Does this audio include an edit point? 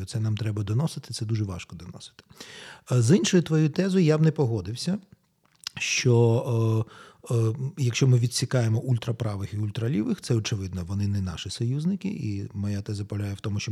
no; 0 cuts

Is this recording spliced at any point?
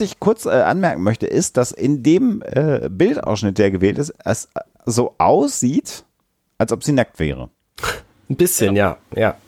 no; 0 cuts

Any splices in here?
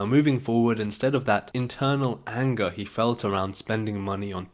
no; 0 cuts

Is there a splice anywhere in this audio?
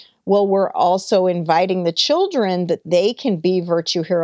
no; 0 cuts

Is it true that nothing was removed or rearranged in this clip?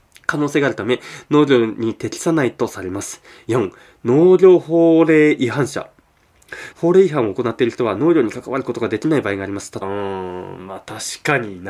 no; 2 cuts; at 6.7 s, 9.8 s

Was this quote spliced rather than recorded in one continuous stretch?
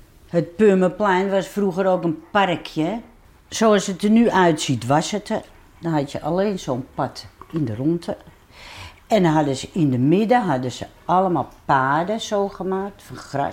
no; 0 cuts

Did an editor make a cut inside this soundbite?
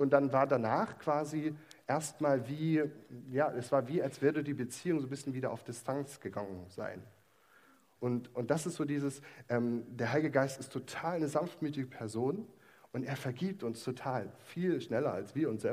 yes; 1 cut; at 8.0 s

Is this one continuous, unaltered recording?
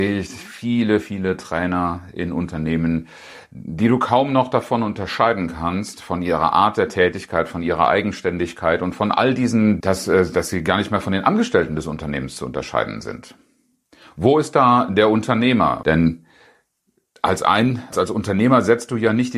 no; 3 cuts; at 9.8 s, 15.8 s, 17.9 s

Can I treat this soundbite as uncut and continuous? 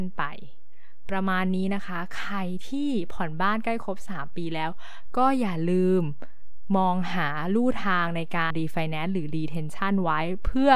no; 1 cut; at 8.5 s

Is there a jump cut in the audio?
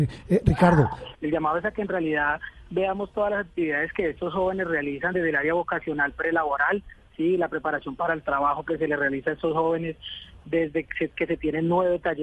yes; 1 cut; at 1.1 s

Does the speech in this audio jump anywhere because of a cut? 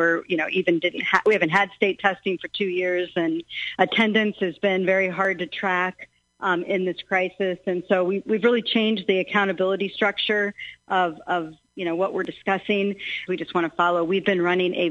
yes; 1 cut; at 13.3 s

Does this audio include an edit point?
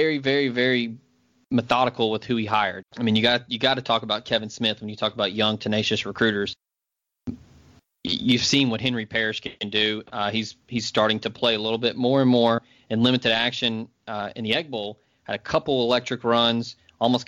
yes; 1 cut; at 2.8 s

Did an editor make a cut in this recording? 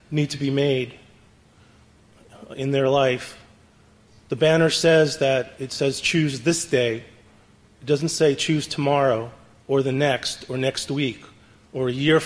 no; 0 cuts

